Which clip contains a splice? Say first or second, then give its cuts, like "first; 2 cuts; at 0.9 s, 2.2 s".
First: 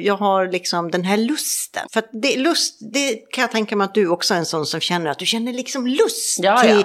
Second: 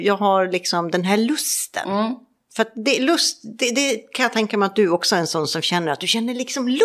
first; 2 cuts; at 1.8 s, 2.9 s